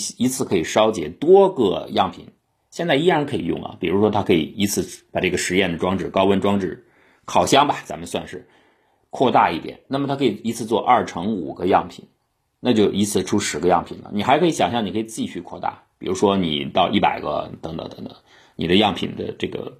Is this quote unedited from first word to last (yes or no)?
yes